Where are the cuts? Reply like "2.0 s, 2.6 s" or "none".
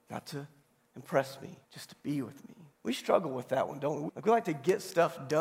1.6 s, 2.7 s, 4.1 s